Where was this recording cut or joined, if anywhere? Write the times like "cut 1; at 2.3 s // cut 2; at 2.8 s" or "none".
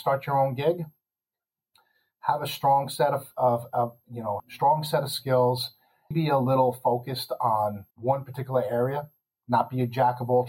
cut 1; at 4.4 s // cut 2; at 6.1 s // cut 3; at 7.9 s